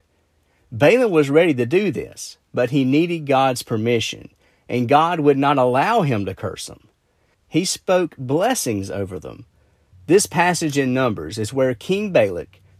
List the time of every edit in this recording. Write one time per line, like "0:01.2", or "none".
0:07.3
0:09.9